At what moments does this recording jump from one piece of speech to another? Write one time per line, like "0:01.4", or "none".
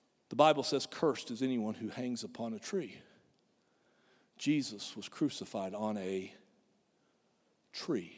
none